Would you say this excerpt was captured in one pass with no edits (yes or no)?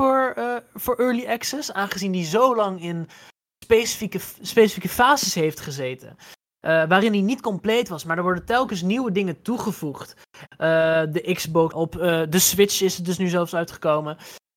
no